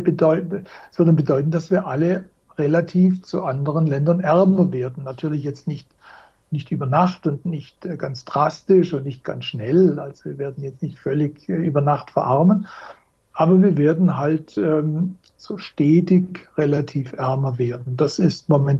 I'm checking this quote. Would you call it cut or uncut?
uncut